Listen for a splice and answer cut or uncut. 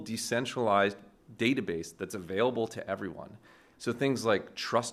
cut